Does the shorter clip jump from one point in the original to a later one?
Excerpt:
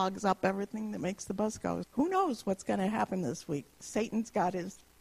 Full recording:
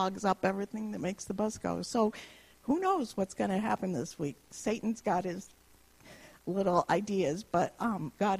yes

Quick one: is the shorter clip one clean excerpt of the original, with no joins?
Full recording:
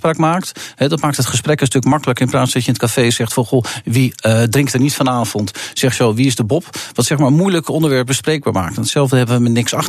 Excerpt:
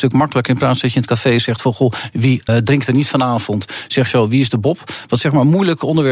no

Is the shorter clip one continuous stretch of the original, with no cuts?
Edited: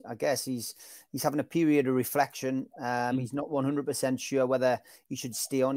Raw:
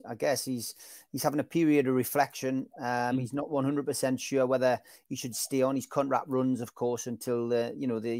yes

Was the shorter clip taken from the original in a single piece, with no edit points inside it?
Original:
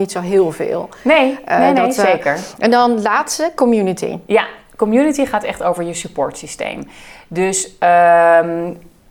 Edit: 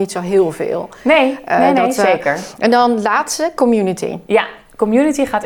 yes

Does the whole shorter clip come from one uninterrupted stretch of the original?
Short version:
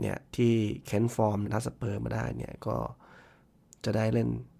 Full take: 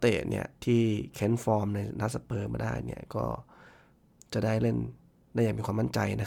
no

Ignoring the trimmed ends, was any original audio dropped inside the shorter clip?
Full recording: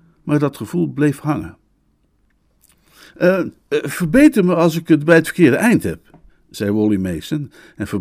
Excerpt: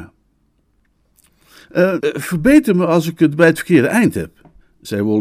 yes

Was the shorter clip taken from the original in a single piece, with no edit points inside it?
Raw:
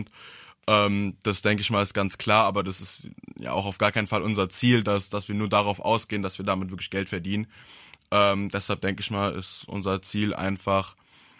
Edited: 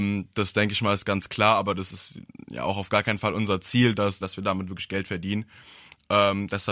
no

